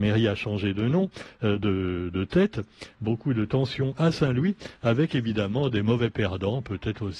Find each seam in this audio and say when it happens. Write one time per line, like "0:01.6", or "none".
0:02.9